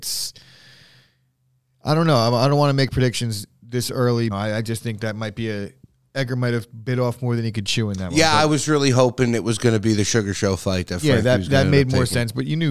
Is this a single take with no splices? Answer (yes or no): no